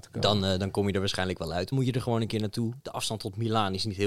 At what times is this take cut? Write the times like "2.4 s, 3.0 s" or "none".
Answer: 1.7 s, 2.8 s